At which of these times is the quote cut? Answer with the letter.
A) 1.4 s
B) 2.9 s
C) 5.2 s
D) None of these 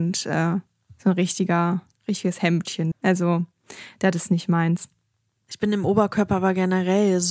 B